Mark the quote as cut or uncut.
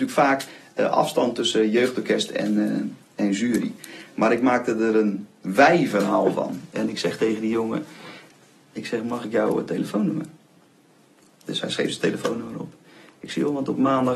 uncut